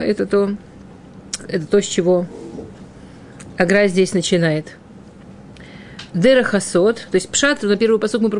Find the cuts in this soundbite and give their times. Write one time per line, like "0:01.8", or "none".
0:01.4
0:06.1